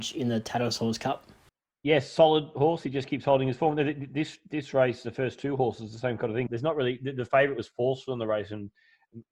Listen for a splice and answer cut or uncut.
cut